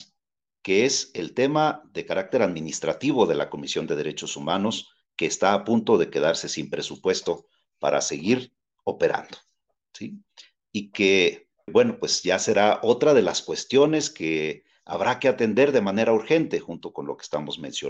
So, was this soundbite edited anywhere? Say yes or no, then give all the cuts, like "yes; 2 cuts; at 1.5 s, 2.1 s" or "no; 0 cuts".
yes; 1 cut; at 11.7 s